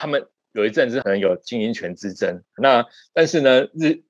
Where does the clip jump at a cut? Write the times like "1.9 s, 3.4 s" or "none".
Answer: 1.0 s, 2.6 s